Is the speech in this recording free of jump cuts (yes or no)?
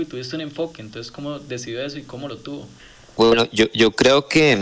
yes